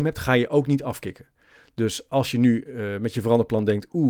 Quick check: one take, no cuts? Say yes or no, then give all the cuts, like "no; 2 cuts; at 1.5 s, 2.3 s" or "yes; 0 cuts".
yes; 0 cuts